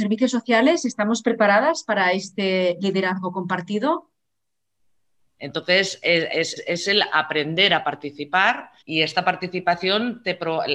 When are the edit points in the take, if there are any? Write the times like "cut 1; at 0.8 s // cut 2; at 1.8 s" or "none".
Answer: cut 1; at 5.4 s // cut 2; at 6.6 s // cut 3; at 8.8 s